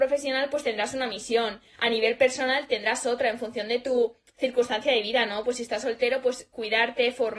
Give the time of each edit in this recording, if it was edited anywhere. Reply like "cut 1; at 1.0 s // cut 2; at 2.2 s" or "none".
none